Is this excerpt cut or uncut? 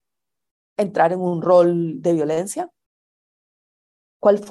uncut